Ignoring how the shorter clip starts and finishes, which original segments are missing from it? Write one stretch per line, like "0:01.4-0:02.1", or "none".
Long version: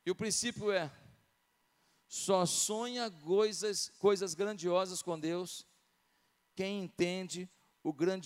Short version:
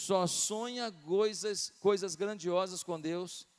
none